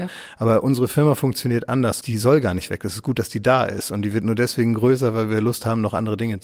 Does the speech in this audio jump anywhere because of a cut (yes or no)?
yes